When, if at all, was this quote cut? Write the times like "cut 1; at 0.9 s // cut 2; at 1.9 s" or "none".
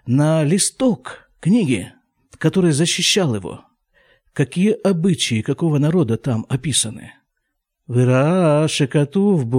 none